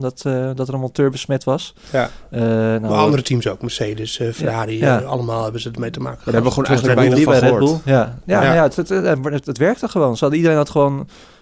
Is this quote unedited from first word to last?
yes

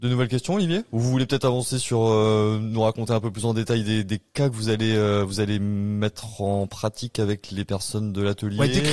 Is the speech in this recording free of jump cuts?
yes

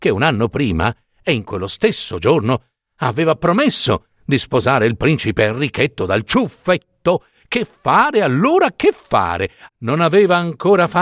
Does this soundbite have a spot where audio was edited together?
yes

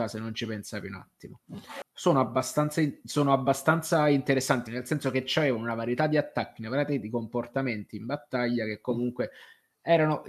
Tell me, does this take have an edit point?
yes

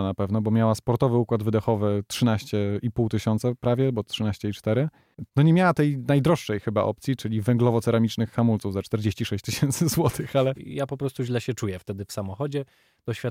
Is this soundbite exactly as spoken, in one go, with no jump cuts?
no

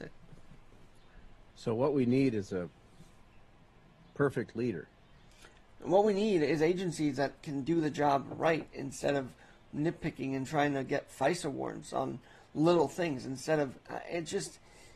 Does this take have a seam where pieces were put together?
no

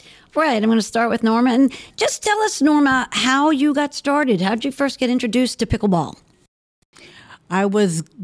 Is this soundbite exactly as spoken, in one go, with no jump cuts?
yes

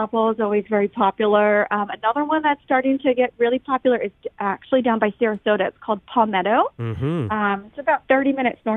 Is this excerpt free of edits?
yes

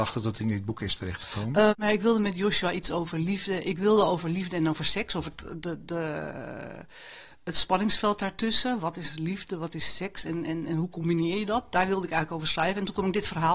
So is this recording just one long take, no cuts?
no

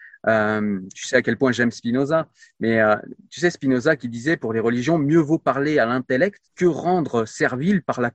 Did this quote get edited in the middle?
yes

